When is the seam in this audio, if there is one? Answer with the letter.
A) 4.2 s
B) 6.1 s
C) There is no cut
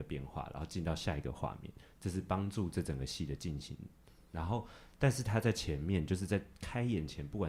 C